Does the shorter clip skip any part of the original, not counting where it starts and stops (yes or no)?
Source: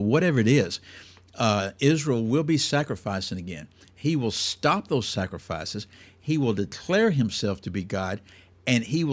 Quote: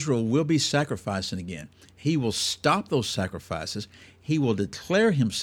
no